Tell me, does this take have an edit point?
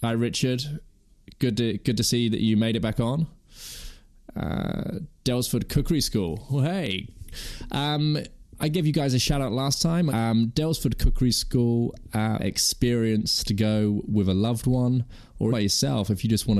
yes; 3 cuts; at 10.1 s, 12.4 s, 15.5 s

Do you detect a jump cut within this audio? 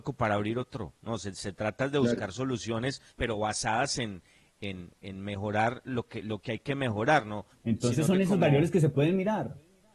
yes; 2 cuts; at 3.1 s, 7.5 s

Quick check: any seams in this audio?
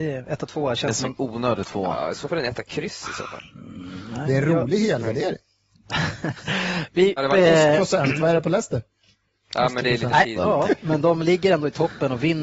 yes; 2 cuts; at 7.2 s, 10.4 s

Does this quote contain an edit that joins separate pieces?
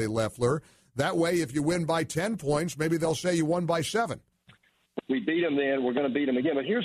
yes; 1 cut; at 5.0 s

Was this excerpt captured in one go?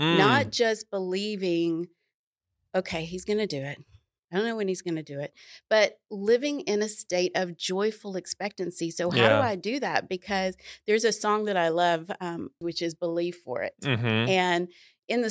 no; 1 cut; at 12.6 s

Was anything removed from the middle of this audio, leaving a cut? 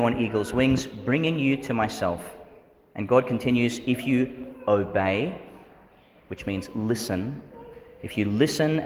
no; 0 cuts

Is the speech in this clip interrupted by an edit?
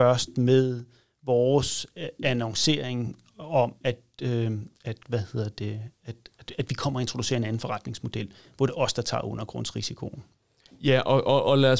no; 0 cuts

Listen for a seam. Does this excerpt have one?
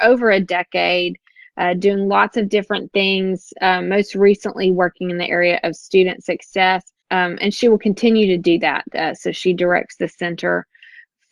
no; 0 cuts

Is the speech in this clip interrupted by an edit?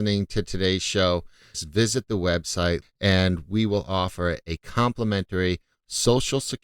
yes; 2 cuts; at 1.5 s, 2.8 s

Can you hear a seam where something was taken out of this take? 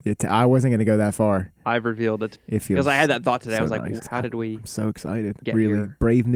yes; 2 cuts; at 1.6 s, 4.0 s

